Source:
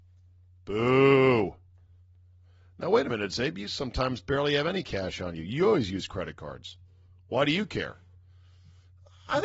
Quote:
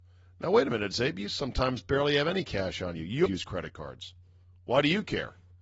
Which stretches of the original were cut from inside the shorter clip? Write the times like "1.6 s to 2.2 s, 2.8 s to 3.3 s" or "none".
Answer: 5.6 s to 5.9 s